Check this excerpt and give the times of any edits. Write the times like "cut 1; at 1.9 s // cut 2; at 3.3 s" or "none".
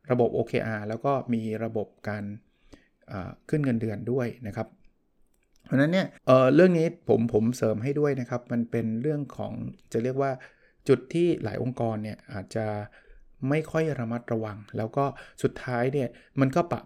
cut 1; at 6.2 s

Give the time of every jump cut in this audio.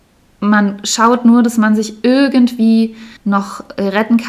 cut 1; at 3.2 s

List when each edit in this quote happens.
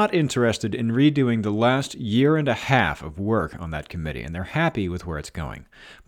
none

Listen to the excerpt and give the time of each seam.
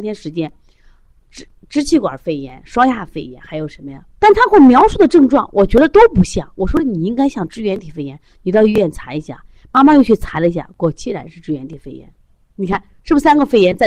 cut 1; at 4.2 s

